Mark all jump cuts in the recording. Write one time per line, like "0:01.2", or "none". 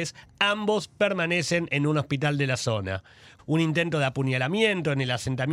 0:03.4